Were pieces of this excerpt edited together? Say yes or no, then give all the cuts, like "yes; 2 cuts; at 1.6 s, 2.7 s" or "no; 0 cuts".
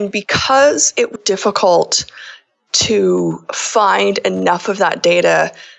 yes; 1 cut; at 1.2 s